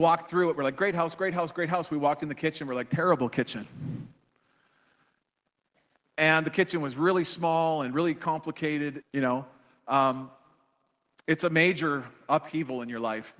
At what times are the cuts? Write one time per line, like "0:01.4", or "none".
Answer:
0:09.0